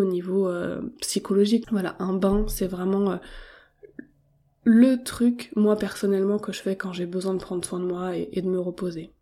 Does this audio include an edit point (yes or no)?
yes